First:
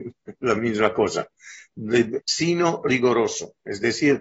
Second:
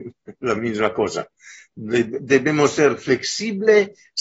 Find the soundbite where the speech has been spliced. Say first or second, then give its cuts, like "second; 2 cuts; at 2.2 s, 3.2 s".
first; 1 cut; at 2.2 s